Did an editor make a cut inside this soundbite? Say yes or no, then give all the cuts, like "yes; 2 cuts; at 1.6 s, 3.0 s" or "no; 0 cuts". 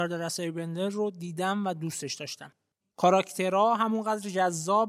yes; 1 cut; at 2.8 s